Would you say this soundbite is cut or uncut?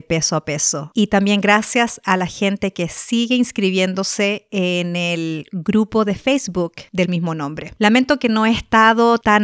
uncut